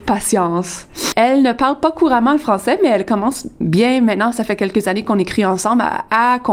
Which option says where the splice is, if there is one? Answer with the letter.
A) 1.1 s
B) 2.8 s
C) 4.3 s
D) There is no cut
A